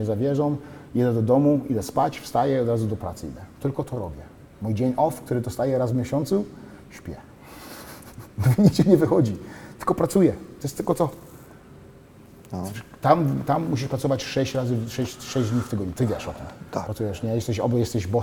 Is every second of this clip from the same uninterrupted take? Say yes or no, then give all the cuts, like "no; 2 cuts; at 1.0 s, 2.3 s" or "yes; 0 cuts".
yes; 0 cuts